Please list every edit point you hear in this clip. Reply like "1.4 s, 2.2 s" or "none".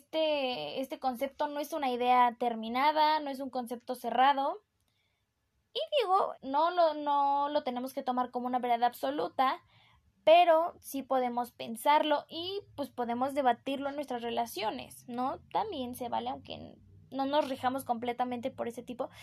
6.3 s